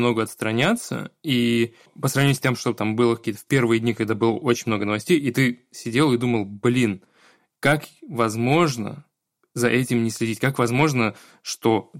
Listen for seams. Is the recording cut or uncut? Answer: uncut